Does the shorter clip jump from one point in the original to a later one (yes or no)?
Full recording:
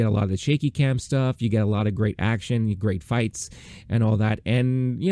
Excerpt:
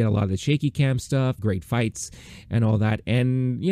yes